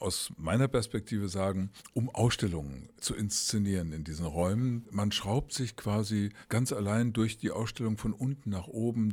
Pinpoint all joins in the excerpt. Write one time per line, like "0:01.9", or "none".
0:01.9